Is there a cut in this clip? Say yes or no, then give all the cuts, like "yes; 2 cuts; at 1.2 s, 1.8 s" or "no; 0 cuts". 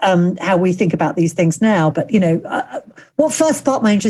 yes; 1 cut; at 1.9 s